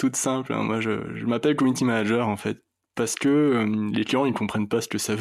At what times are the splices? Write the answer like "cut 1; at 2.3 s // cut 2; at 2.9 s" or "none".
none

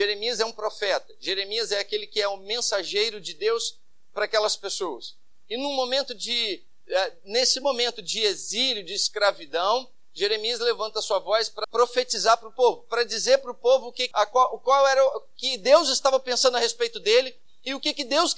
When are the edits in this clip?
cut 1; at 11.6 s // cut 2; at 14.1 s

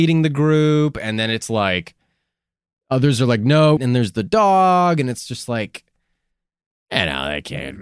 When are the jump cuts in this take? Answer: cut 1; at 3.8 s

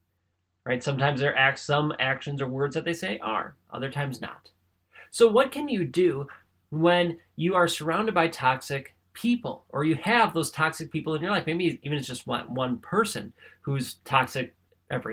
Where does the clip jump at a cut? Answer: none

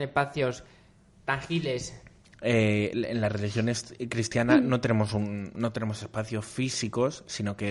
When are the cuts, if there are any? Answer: cut 1; at 2.3 s

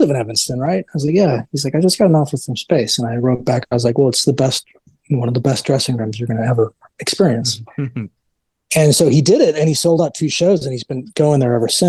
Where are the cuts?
none

